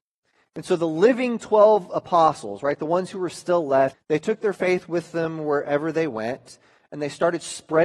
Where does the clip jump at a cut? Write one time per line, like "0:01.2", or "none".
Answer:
0:03.9